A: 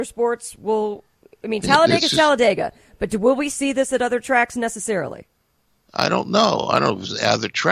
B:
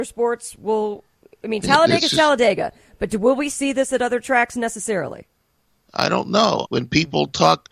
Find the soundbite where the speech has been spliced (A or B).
B